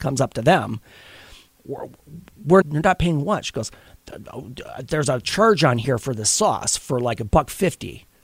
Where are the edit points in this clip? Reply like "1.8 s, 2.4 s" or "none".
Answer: 1.5 s, 2.6 s